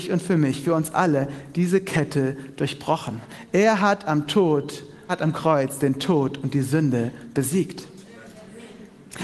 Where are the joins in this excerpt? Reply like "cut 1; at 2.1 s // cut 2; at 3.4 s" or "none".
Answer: cut 1; at 5.1 s